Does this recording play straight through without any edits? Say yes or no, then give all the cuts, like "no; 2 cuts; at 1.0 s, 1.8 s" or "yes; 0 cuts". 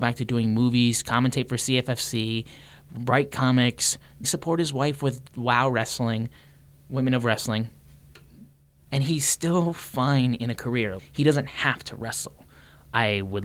no; 3 cuts; at 4.2 s, 8.9 s, 11.0 s